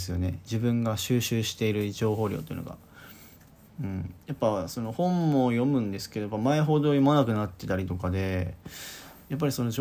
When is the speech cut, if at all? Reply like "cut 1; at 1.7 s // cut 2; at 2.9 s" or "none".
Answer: none